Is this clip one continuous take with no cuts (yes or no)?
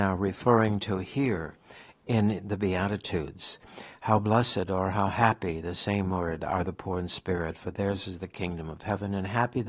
yes